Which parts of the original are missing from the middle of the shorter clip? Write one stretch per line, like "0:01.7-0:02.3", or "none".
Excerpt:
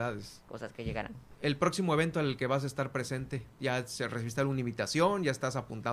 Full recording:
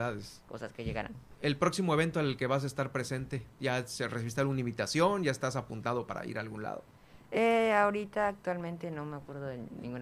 none